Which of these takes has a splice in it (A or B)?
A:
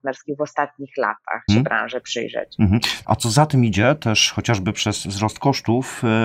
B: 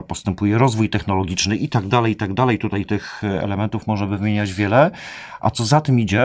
A